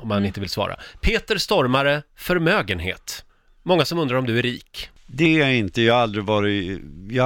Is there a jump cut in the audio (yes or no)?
no